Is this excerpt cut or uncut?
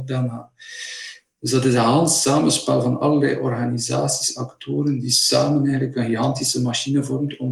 uncut